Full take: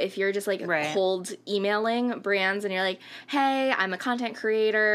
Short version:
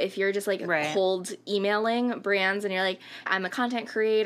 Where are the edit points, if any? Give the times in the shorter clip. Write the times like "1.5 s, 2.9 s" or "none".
3.3 s